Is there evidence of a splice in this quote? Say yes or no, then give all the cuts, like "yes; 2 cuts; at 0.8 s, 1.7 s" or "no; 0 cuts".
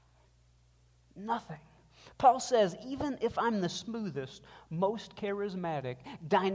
no; 0 cuts